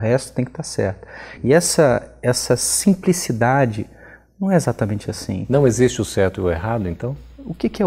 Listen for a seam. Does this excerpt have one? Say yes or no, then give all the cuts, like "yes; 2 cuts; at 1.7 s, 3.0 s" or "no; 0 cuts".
no; 0 cuts